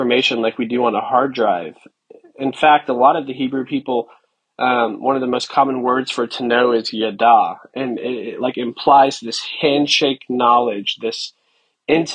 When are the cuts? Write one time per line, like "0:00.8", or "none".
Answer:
none